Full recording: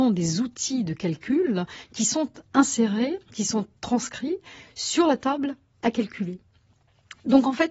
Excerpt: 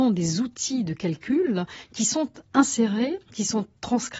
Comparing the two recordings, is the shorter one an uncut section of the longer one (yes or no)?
yes